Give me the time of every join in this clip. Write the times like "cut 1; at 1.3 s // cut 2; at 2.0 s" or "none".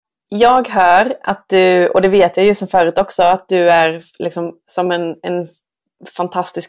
none

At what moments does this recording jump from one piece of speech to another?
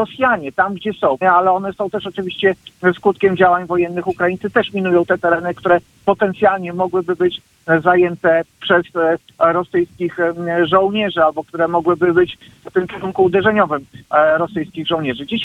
cut 1; at 1.2 s

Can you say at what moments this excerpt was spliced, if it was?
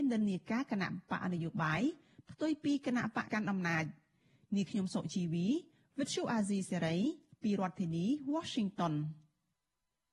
cut 1; at 3.3 s

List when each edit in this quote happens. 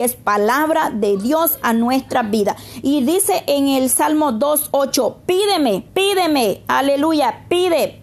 cut 1; at 5.9 s

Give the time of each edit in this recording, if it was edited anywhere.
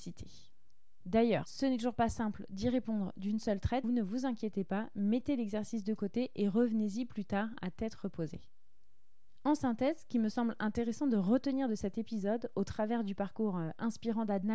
cut 1; at 3.8 s

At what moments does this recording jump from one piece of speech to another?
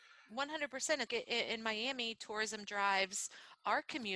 cut 1; at 1.1 s

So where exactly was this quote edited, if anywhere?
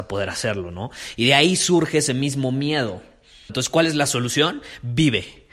cut 1; at 3.5 s

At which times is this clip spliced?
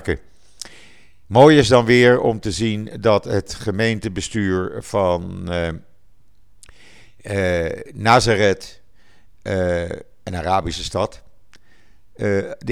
none

